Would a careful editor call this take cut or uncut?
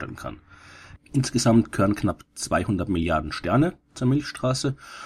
cut